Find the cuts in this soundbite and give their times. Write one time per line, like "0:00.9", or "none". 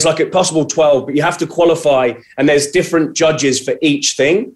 none